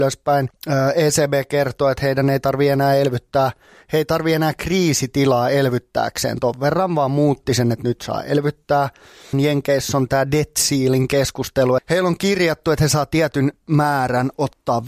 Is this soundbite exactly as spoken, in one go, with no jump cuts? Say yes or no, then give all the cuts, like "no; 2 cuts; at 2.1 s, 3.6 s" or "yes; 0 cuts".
no; 2 cuts; at 9.3 s, 11.8 s